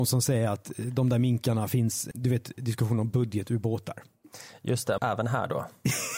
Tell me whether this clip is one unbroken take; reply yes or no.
no